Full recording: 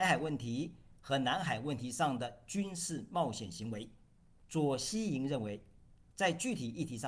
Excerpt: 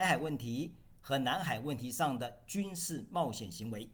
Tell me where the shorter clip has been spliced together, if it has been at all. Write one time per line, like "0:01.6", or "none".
none